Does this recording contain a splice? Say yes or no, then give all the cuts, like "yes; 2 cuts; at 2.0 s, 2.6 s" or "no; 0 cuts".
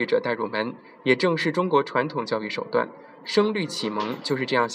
yes; 1 cut; at 3.2 s